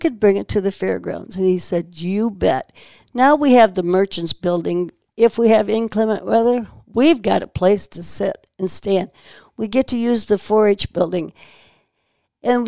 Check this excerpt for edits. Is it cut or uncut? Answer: uncut